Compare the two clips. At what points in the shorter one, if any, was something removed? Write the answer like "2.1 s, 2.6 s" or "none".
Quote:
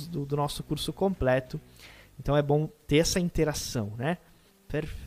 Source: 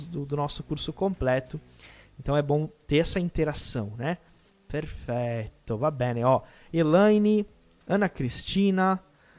none